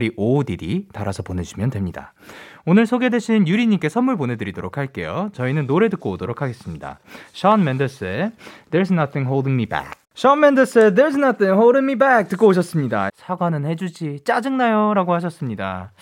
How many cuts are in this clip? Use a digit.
2